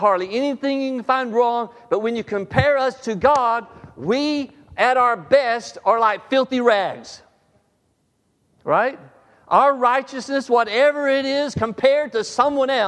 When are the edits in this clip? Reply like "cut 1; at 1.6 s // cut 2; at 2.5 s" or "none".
none